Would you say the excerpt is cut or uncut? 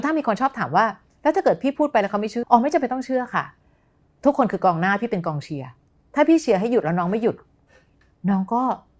cut